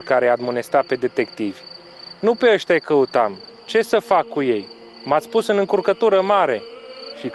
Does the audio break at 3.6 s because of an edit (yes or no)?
no